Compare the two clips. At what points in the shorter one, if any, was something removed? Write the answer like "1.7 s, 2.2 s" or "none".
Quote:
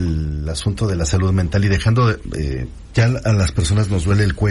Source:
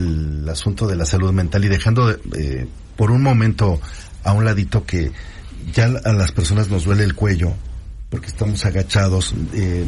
2.9 s